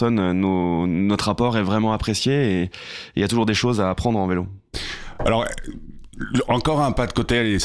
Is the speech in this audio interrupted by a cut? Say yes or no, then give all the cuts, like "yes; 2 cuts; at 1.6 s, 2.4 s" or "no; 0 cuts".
no; 0 cuts